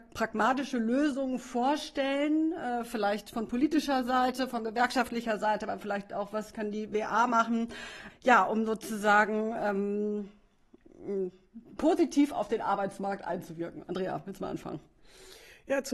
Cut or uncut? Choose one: cut